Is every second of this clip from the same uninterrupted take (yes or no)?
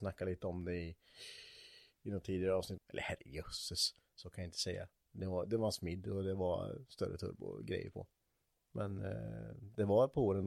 no